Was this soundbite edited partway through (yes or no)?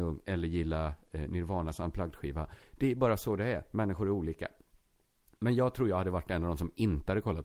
no